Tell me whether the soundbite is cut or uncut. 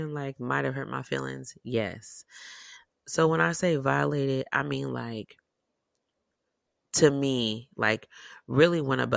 uncut